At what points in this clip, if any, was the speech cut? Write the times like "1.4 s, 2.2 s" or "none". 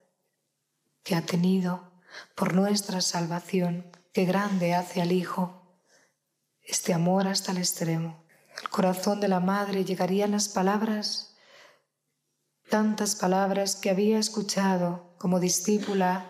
none